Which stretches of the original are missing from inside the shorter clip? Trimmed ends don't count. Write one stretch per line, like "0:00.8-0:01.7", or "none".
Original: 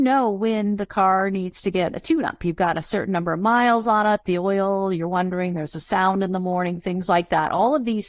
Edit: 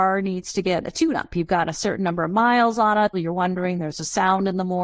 0:04.2-0:04.9